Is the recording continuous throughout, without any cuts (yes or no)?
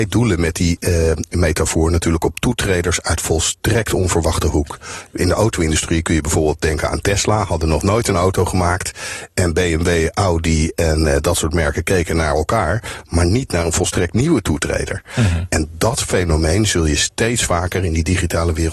yes